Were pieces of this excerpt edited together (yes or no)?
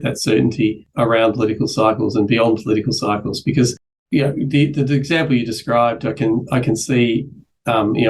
no